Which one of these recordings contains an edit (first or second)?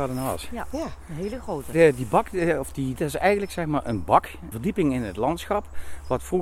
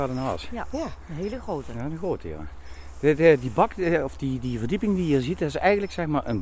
first